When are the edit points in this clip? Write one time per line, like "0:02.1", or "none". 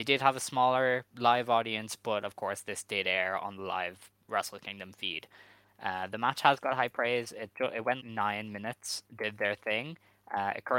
0:08.0
0:09.0